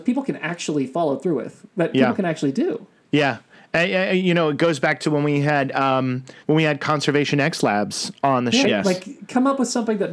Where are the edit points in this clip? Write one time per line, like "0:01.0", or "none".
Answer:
0:06.4
0:08.6